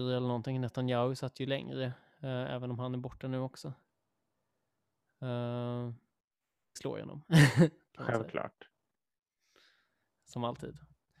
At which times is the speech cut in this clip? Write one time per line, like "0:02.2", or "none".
0:06.8